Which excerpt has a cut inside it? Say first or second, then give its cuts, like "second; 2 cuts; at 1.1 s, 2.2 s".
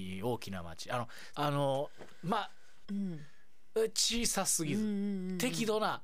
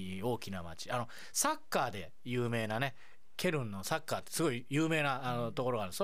first; 2 cuts; at 1.3 s, 2.8 s